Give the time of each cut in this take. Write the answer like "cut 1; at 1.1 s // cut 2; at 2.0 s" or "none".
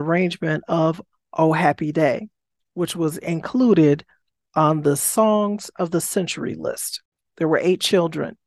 cut 1; at 7.2 s

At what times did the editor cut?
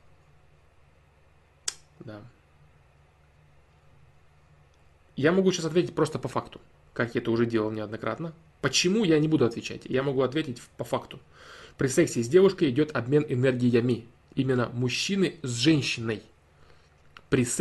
none

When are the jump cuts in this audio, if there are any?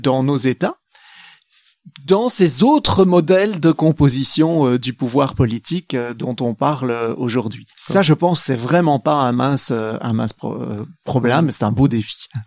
cut 1; at 7.7 s

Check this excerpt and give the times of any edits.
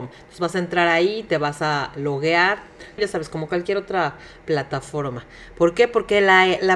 cut 1; at 3.0 s

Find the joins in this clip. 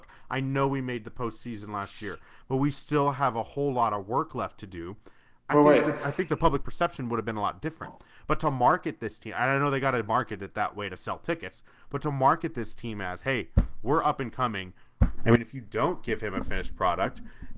cut 1; at 15.2 s

